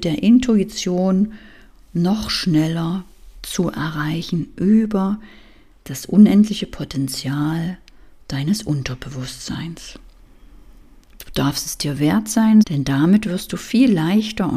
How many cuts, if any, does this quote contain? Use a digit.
1